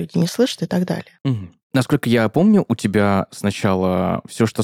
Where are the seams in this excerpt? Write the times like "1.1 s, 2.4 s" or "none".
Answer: none